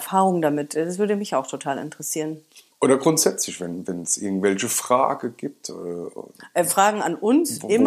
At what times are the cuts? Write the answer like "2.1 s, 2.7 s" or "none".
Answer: none